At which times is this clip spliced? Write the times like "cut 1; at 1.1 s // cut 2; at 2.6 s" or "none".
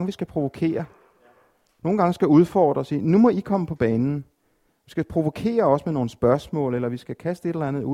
none

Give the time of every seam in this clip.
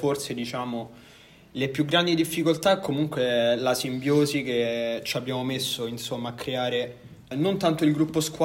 cut 1; at 7.3 s

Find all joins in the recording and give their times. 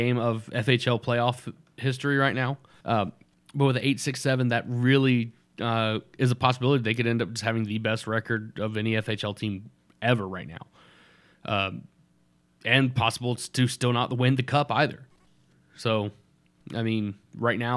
cut 1; at 2.8 s

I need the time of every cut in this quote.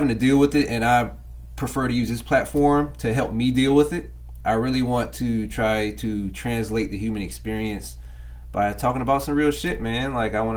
cut 1; at 4.4 s

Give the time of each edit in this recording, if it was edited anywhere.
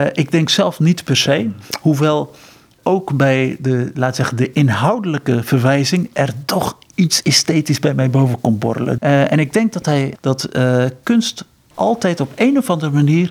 cut 1; at 9.0 s // cut 2; at 10.2 s

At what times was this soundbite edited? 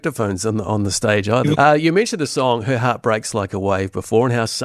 cut 1; at 1.5 s

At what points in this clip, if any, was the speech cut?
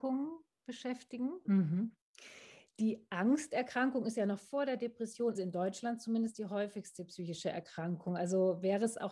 cut 1; at 1.5 s // cut 2; at 5.4 s

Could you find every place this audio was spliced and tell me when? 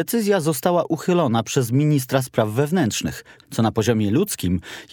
cut 1; at 3.4 s

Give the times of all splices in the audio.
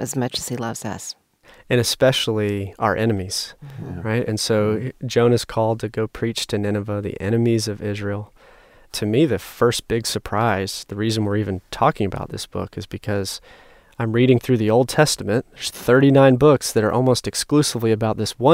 none

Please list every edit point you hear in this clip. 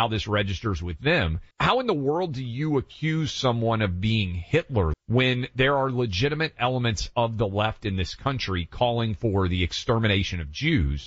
cut 1; at 1.5 s // cut 2; at 4.9 s

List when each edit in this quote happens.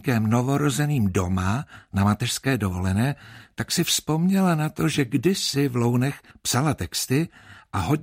none

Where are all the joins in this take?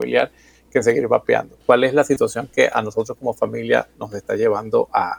cut 1; at 1.6 s

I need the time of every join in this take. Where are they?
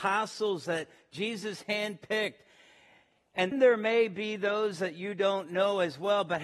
cut 1; at 3.5 s

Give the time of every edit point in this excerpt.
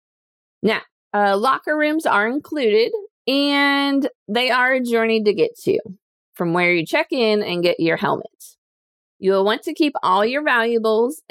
cut 1; at 1.1 s

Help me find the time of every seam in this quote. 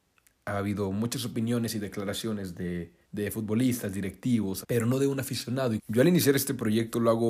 cut 1; at 3.0 s // cut 2; at 4.6 s // cut 3; at 5.8 s

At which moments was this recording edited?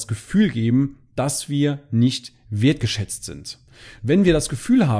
cut 1; at 4.0 s

